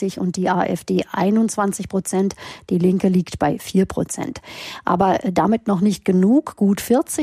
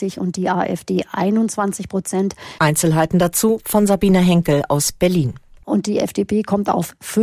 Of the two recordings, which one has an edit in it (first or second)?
second